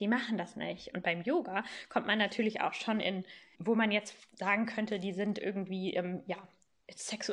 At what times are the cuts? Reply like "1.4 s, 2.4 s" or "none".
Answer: 0.9 s, 3.5 s